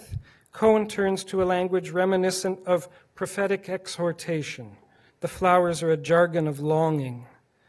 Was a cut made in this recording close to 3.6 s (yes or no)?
no